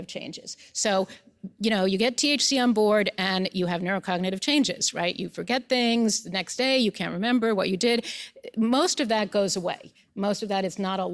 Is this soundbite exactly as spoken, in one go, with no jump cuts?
yes; 0 cuts

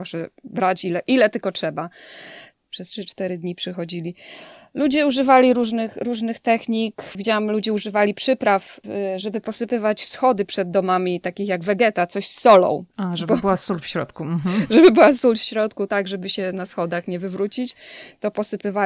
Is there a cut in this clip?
no; 0 cuts

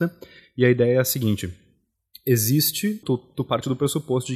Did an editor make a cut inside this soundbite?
yes; 1 cut; at 3.0 s

